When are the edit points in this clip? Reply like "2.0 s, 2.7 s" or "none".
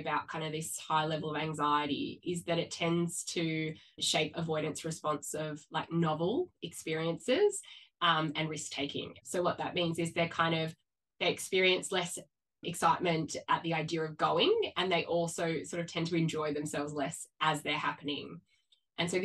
9.2 s